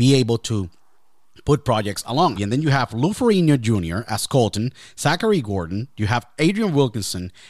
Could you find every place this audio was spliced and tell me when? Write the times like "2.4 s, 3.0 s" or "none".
2.3 s